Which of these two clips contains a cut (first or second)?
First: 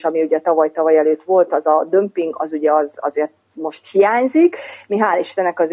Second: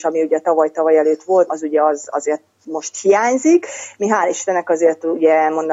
second